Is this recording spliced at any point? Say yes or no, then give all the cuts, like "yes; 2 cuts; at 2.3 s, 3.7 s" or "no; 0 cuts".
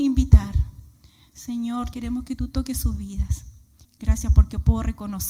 yes; 2 cuts; at 1.9 s, 3.8 s